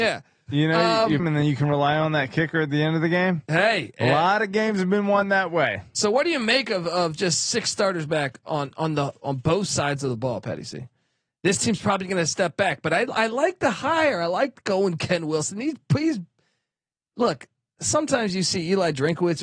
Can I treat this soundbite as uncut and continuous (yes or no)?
no